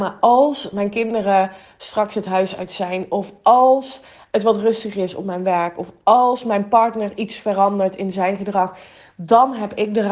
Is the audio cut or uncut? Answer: uncut